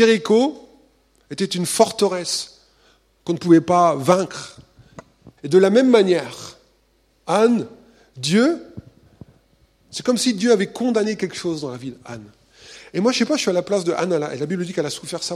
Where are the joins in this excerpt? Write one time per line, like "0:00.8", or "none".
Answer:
0:05.4